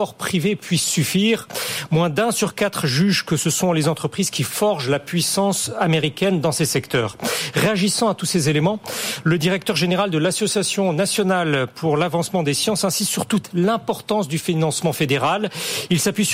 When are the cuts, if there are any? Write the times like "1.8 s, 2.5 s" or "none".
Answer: none